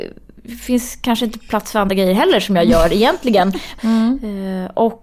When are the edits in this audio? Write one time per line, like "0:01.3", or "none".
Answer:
0:03.8